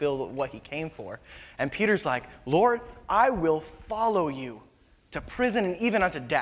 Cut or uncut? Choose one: uncut